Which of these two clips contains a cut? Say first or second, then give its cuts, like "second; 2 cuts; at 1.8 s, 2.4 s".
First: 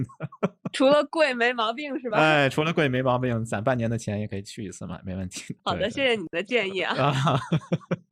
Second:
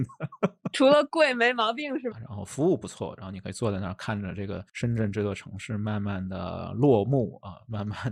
second; 1 cut; at 2.1 s